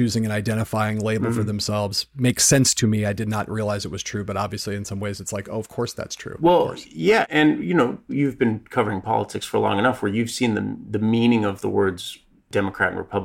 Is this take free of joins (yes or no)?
yes